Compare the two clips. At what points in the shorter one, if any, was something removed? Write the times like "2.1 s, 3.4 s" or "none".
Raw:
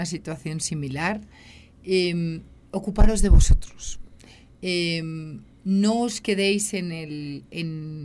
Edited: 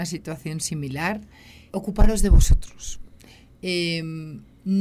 1.7 s